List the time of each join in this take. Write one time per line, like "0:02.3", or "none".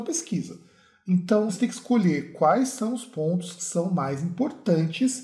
0:01.5